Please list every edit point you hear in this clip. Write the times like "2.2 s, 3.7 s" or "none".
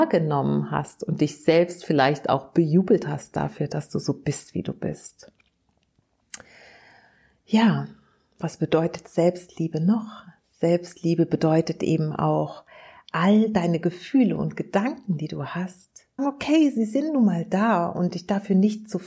16.2 s

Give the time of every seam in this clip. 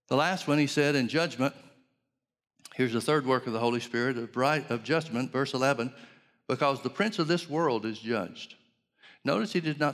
none

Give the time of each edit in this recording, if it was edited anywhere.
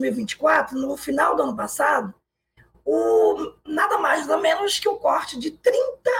none

